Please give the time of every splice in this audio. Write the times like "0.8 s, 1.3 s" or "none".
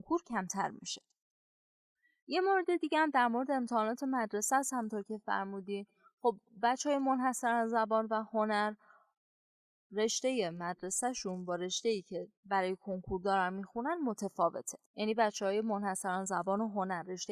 none